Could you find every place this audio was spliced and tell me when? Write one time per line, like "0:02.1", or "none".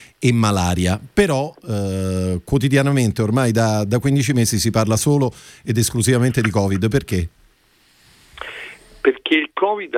none